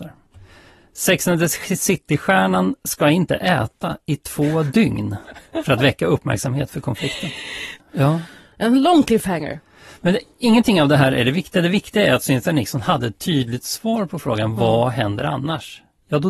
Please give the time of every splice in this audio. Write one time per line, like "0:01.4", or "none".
0:07.8